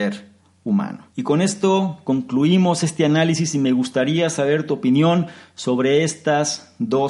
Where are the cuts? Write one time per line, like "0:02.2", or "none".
0:01.1